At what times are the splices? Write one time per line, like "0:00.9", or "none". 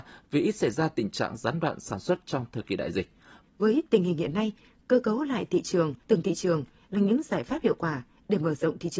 0:03.4
0:06.0